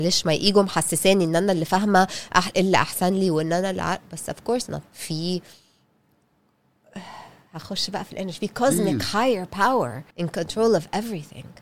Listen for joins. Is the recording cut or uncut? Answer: cut